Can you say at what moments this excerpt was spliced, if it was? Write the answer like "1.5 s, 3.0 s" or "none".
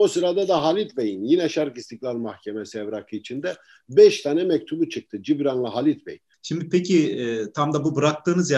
6.3 s